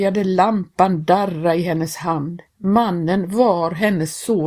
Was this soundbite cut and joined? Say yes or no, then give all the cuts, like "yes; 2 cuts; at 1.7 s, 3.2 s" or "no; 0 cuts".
no; 0 cuts